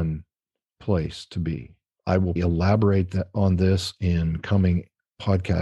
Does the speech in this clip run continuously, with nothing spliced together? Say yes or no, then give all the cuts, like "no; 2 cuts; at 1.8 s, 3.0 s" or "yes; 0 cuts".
no; 1 cut; at 2.4 s